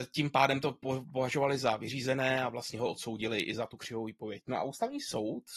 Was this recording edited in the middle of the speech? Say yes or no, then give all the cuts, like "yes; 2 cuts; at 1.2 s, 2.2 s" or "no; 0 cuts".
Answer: no; 0 cuts